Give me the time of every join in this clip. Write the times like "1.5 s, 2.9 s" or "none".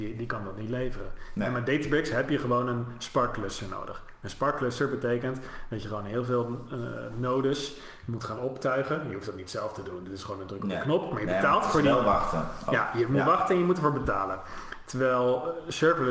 none